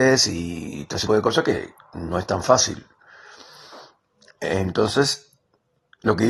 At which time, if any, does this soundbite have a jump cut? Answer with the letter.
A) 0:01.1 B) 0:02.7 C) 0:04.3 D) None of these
A